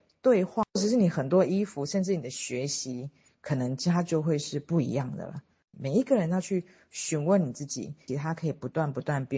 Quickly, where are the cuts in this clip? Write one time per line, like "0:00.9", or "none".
0:05.7
0:08.1